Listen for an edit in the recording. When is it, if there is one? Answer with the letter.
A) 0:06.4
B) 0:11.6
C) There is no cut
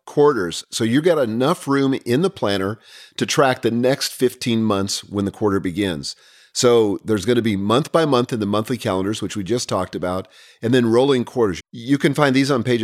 B